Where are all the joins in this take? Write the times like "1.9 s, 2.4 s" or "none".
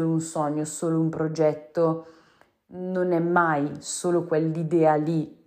none

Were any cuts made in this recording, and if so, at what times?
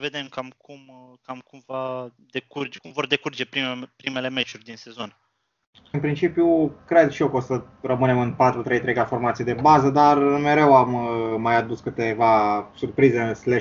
5.9 s

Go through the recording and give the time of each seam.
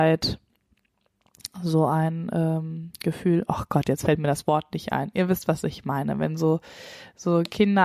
none

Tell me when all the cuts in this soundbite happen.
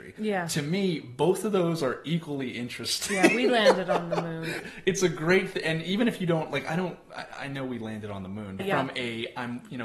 4.6 s, 8.6 s

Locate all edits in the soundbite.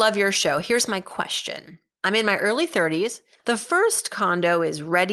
3.4 s

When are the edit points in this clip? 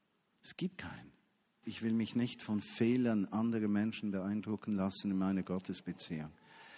1.6 s

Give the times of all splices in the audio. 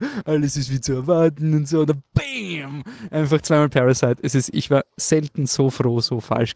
none

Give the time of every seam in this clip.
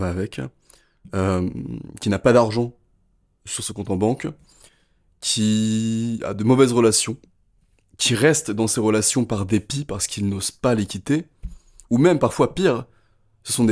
none

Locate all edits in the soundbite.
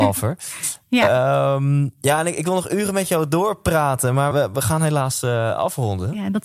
4.3 s

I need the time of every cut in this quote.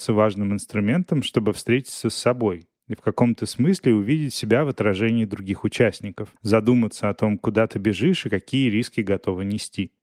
6.4 s

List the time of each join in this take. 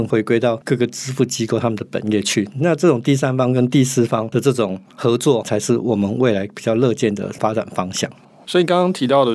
none

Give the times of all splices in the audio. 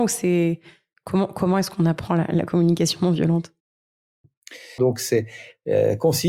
4.8 s

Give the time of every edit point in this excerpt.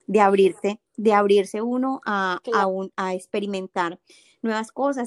none

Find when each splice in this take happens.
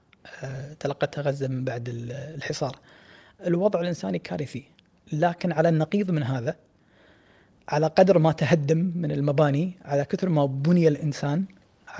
none

